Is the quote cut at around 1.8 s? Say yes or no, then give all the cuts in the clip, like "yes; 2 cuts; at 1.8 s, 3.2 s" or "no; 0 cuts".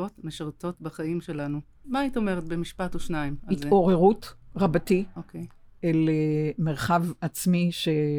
yes; 1 cut; at 1.8 s